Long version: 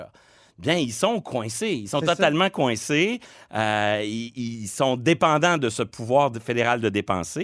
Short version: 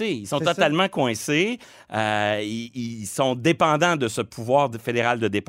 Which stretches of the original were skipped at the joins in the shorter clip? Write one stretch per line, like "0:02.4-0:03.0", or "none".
none